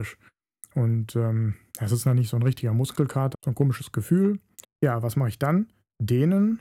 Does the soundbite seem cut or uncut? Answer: cut